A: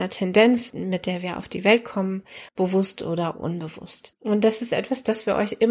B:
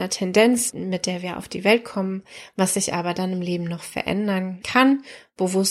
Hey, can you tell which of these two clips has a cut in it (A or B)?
A